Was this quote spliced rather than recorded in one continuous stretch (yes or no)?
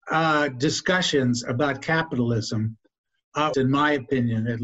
yes